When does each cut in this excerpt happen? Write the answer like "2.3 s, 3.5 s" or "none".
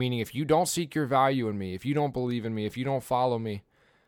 none